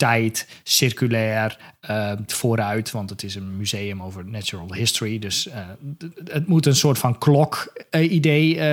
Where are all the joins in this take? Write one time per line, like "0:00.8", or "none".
0:02.3